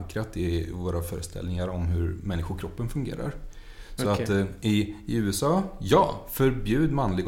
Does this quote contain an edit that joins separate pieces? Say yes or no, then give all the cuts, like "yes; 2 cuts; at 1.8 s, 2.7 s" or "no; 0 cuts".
no; 0 cuts